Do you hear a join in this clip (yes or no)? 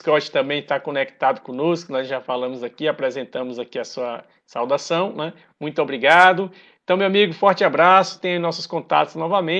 no